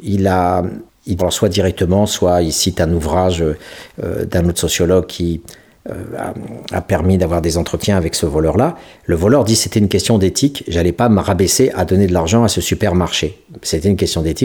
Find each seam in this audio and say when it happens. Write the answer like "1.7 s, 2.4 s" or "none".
1.2 s